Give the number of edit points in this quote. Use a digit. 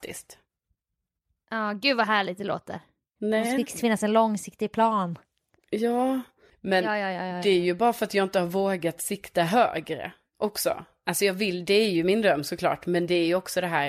2